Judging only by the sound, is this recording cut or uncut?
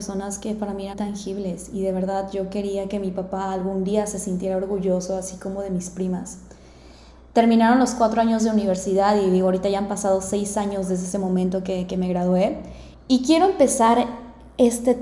cut